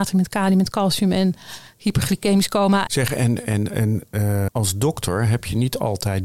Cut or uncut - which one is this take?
cut